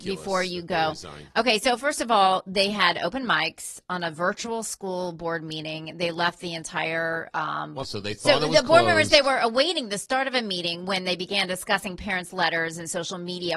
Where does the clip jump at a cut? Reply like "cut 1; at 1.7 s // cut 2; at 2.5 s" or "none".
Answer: cut 1; at 7.8 s